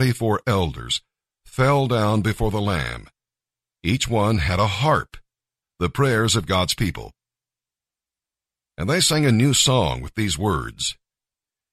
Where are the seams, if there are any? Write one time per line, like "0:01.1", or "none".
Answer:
0:05.6